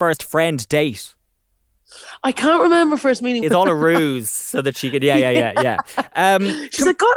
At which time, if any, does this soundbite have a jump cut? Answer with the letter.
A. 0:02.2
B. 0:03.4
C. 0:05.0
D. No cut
B